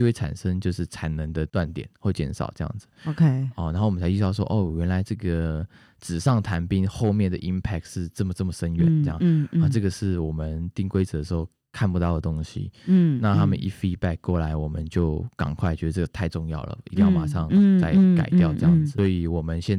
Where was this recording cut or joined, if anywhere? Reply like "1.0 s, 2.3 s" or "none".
none